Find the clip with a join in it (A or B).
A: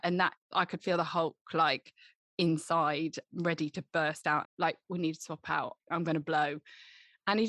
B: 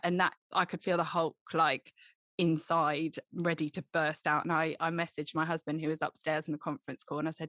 A